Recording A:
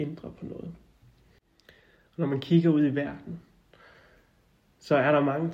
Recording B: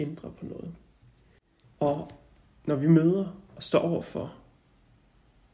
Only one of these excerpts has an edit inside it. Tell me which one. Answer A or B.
B